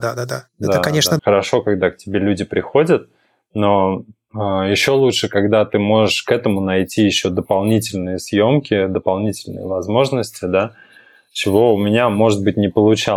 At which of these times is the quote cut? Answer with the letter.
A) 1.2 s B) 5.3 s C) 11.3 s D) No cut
A